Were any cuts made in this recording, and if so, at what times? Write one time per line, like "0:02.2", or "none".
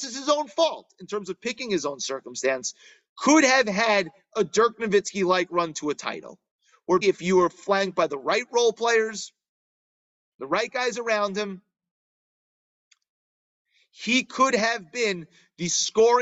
0:07.0